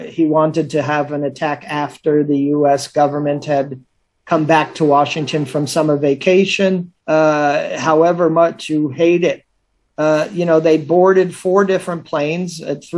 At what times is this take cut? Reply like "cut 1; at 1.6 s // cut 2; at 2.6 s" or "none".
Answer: cut 1; at 7.0 s